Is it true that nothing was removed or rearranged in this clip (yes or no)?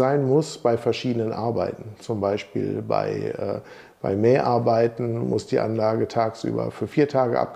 yes